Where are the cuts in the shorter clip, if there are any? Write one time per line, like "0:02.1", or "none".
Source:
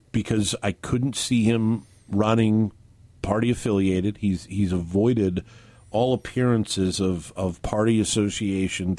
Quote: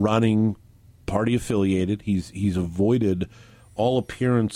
none